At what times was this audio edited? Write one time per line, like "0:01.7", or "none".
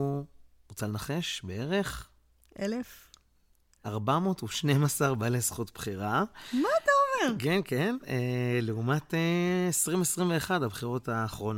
none